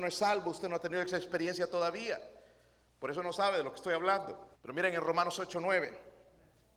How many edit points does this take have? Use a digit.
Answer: 1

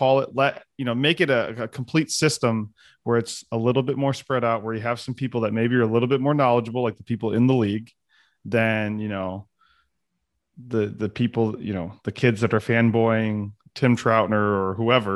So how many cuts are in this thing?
0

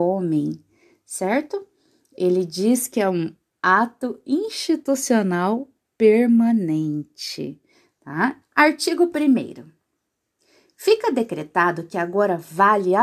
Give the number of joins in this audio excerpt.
1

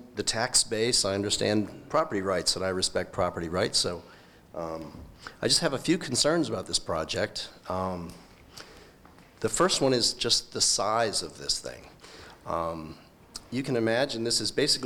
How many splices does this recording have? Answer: 0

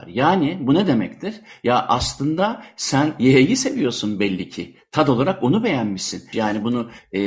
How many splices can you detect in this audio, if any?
1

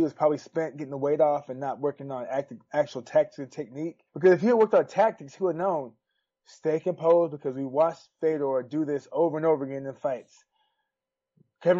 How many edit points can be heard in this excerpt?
1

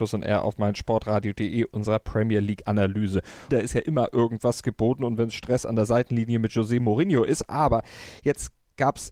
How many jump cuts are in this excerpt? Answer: 1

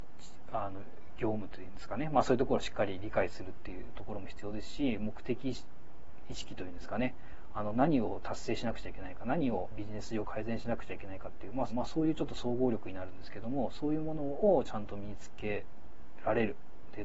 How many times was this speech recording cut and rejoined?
1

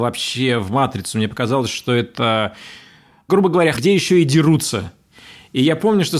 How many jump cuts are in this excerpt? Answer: 1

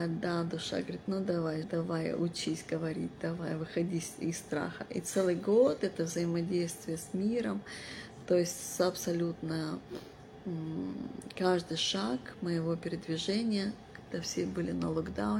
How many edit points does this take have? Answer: 1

